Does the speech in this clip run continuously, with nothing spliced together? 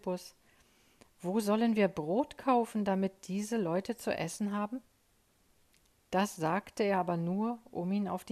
yes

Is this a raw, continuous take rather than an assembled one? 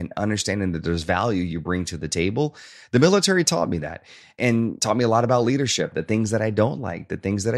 yes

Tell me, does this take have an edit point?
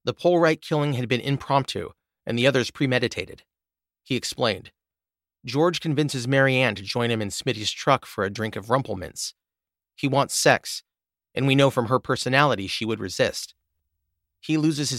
no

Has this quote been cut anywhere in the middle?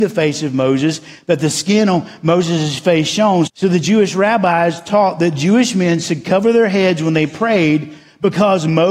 yes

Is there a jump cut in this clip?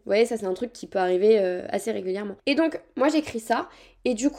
no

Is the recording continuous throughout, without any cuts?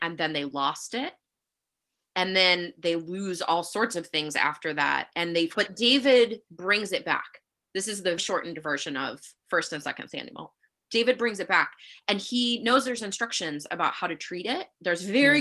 no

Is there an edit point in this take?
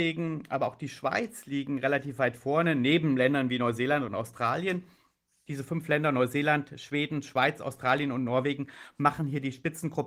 no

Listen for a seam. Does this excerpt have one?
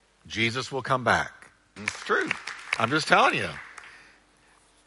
yes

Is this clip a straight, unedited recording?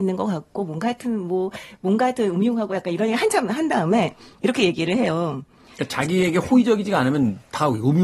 yes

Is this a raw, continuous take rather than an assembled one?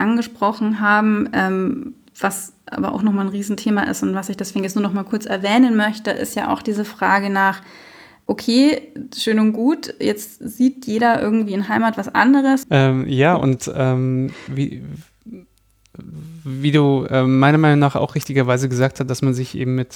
no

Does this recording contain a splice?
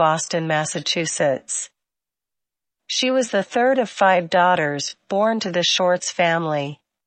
no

